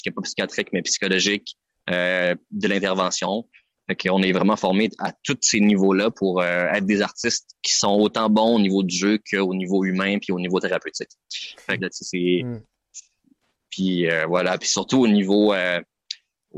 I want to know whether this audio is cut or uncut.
cut